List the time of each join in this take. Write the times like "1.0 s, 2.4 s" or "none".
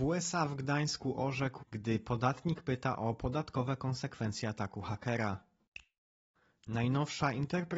1.6 s